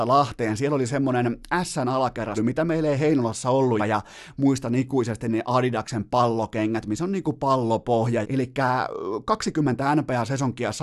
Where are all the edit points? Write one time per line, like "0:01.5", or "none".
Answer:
0:02.4
0:03.8
0:08.2